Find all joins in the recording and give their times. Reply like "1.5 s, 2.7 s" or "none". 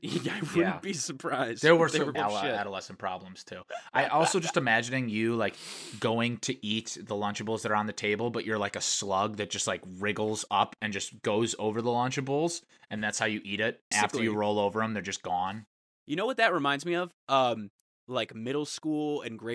2.1 s, 13.9 s